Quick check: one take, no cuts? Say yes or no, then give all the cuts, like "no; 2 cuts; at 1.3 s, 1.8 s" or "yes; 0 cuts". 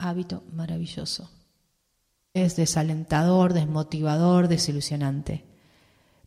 no; 1 cut; at 2.4 s